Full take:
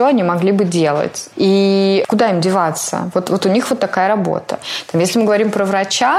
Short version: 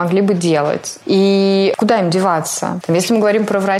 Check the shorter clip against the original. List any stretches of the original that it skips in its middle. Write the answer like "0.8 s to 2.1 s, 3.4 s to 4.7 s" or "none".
3.1 s to 4.9 s